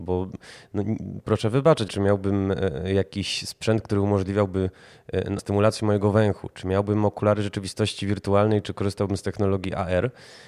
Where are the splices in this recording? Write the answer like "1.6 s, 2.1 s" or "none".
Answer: 1.9 s, 5.4 s

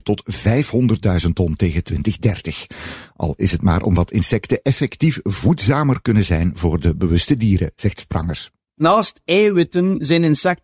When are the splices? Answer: none

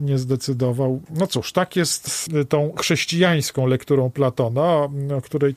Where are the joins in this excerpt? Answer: none

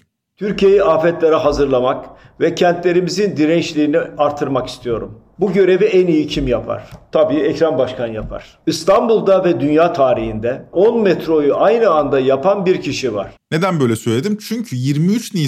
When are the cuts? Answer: 13.4 s

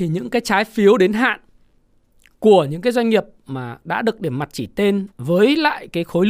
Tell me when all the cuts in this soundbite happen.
5.1 s

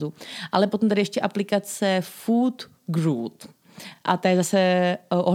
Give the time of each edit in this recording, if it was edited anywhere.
none

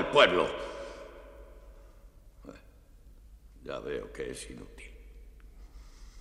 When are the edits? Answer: none

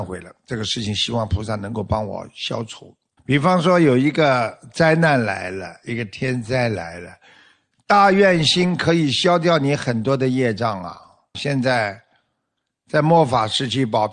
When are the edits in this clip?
3.2 s, 11.3 s

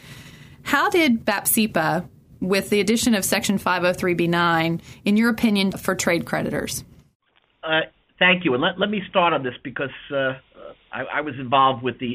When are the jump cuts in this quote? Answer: 5.7 s

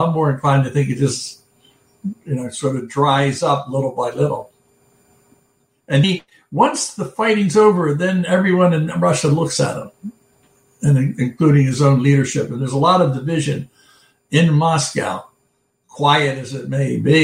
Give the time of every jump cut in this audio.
6.0 s

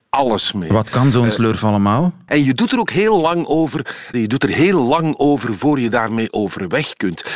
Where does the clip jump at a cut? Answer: 2.3 s, 4.1 s

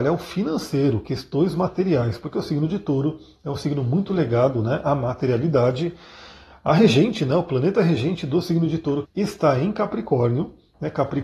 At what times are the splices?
9.0 s

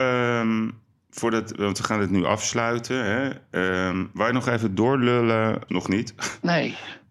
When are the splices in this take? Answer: 5.7 s

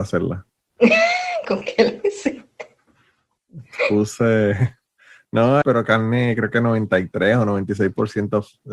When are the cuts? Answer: 5.6 s

